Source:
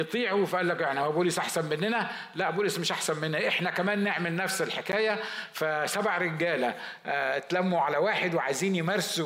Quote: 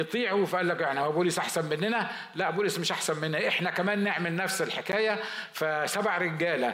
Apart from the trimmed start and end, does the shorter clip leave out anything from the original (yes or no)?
no